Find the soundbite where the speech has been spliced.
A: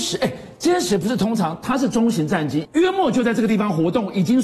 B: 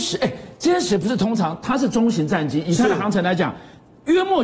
A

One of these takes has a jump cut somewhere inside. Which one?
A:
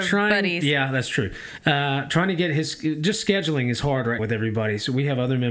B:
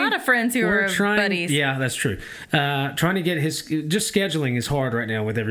A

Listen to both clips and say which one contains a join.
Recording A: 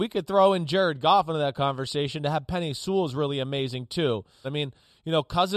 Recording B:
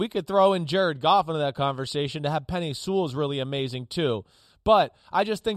A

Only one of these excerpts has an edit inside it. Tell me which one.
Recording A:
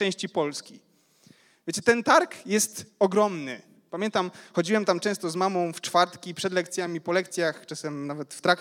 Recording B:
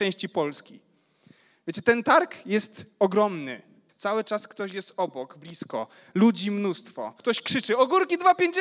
B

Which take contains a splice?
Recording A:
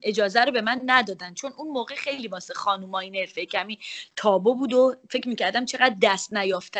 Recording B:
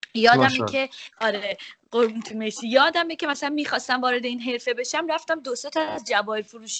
B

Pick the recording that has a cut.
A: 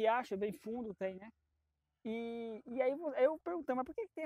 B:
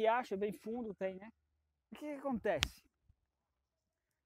B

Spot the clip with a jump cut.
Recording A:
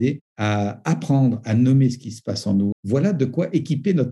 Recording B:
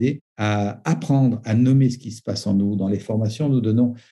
A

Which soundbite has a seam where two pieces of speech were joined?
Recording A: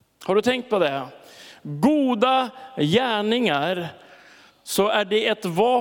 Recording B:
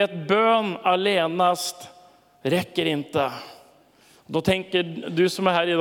A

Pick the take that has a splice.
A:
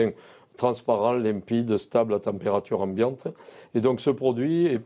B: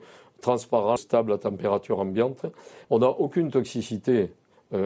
B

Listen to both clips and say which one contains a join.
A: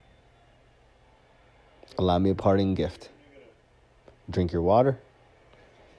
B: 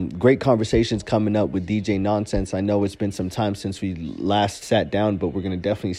B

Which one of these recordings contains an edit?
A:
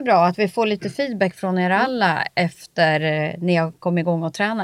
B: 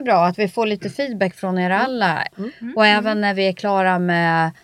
B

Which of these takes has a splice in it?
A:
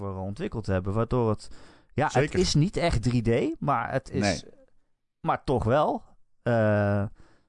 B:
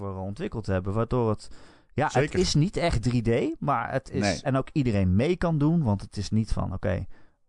B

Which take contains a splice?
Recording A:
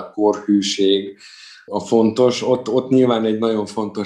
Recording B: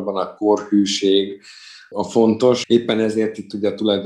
B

